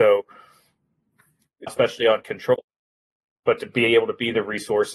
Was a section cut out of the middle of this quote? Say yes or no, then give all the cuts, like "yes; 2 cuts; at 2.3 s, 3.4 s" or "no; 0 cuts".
yes; 1 cut; at 1.7 s